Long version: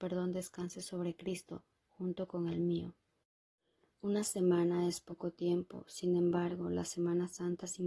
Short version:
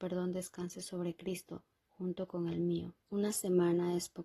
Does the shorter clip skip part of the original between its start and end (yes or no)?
yes